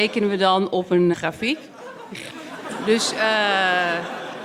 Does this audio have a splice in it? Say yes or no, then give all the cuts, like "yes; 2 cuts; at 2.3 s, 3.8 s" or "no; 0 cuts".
yes; 2 cuts; at 1.1 s, 2.3 s